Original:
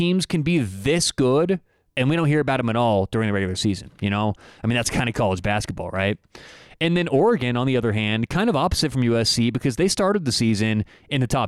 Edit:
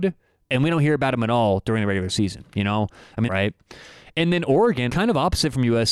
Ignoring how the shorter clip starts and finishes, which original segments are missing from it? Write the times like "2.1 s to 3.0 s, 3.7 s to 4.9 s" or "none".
4.7 s to 5.9 s, 7.5 s to 8.3 s